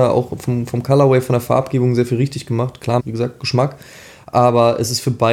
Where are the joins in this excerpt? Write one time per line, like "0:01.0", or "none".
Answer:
0:03.0